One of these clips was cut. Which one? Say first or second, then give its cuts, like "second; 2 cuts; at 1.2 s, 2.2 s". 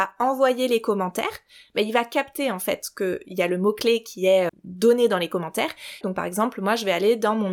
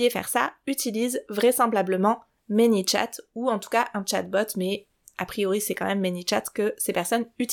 first; 2 cuts; at 4.5 s, 6.0 s